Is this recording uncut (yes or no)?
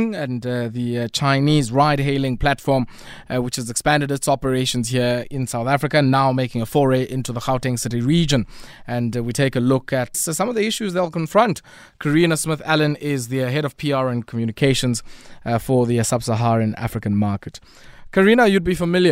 no